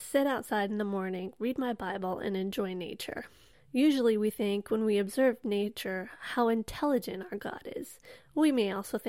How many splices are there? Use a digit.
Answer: 1